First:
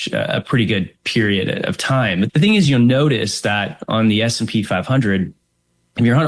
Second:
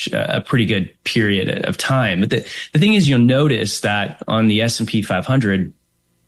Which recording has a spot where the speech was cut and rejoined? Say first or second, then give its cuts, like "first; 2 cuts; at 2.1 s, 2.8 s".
first; 1 cut; at 2.3 s